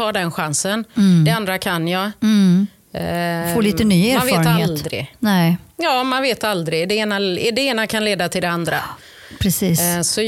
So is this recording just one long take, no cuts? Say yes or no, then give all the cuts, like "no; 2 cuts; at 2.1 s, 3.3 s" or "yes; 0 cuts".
yes; 0 cuts